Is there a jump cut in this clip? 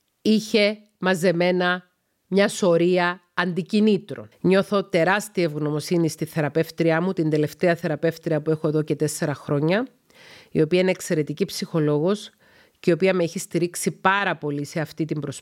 yes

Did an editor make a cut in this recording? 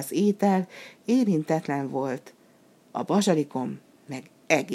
no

